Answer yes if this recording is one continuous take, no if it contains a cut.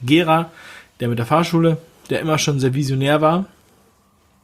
yes